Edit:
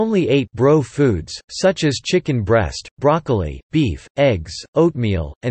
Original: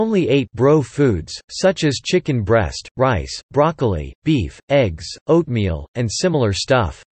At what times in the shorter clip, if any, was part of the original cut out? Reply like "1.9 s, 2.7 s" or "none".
2.9 s